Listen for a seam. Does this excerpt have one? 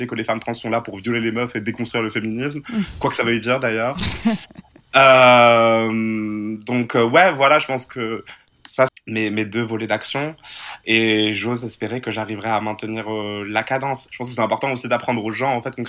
yes; 2 cuts; at 8.9 s, 14.1 s

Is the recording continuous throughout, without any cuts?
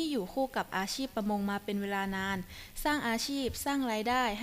yes; 0 cuts

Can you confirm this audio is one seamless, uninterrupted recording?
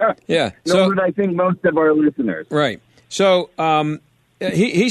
yes; 0 cuts

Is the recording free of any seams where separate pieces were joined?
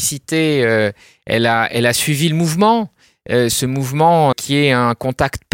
no; 1 cut; at 4.3 s

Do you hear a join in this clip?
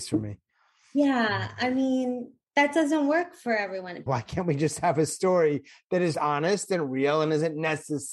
yes; 2 cuts; at 4.1 s, 6.1 s

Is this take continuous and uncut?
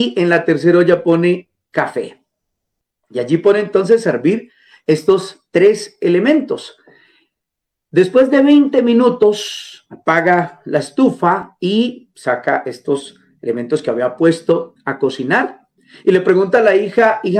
yes; 0 cuts

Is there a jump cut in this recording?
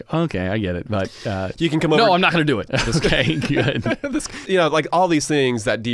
yes; 2 cuts; at 2.7 s, 4.4 s

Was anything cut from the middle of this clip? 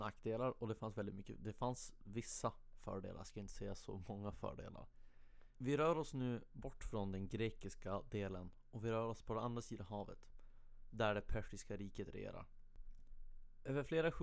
yes; 1 cut; at 5.6 s

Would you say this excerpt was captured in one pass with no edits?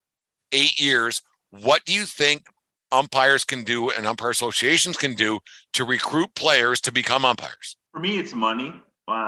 no; 1 cut; at 7.9 s

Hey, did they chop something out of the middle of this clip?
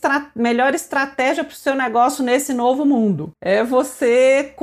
yes; 1 cut; at 3.3 s

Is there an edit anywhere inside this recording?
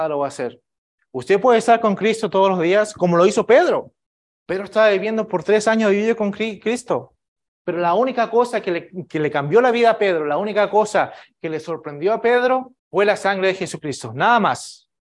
yes; 2 cuts; at 7.5 s, 12.8 s

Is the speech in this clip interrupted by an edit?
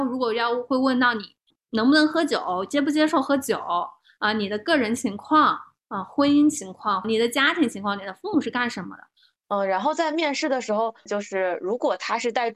yes; 3 cuts; at 7.0 s, 9.4 s, 11.1 s

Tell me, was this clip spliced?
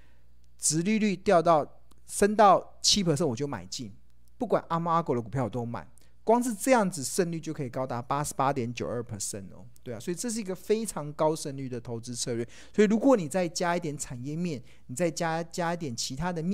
no; 0 cuts

